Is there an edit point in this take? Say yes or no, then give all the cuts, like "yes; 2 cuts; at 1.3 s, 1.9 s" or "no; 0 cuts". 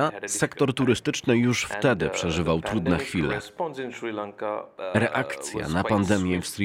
no; 0 cuts